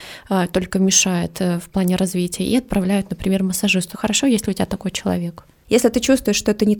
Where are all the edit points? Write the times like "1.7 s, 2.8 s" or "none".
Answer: 3.9 s, 5.6 s